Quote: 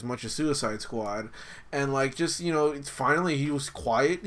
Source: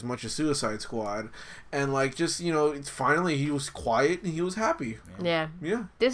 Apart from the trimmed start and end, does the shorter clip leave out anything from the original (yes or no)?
no